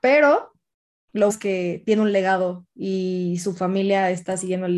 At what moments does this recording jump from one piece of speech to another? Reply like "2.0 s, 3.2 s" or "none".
1.3 s